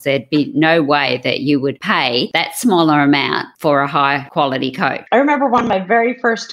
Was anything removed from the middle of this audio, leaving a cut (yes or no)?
yes